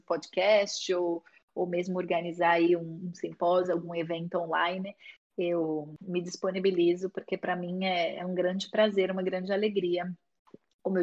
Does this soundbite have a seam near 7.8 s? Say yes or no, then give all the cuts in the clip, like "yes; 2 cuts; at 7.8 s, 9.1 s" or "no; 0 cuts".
no; 0 cuts